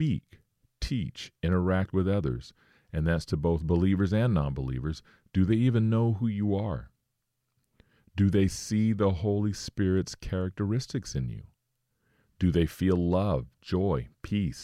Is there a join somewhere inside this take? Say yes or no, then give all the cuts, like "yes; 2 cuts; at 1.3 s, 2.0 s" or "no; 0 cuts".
no; 0 cuts